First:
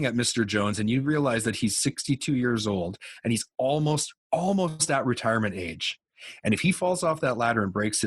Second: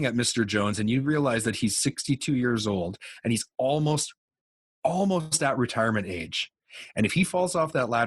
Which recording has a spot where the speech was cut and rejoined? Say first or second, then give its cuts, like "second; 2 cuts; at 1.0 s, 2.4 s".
first; 1 cut; at 4.2 s